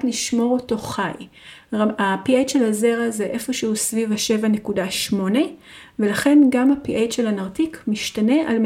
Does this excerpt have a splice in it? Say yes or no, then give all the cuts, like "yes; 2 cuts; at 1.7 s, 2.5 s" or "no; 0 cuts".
no; 0 cuts